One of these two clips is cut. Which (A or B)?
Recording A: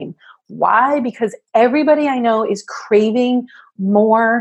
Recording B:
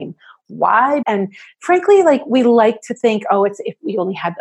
B